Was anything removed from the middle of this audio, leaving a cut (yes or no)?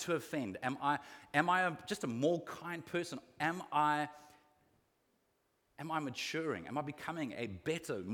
no